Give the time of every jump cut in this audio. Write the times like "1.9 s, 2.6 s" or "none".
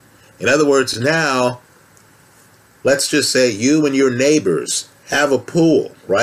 none